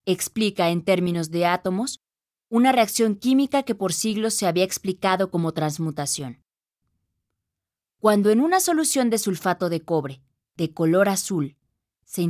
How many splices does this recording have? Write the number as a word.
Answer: zero